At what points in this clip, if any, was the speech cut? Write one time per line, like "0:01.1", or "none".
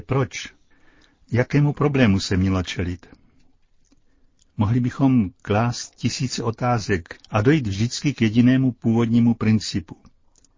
0:07.2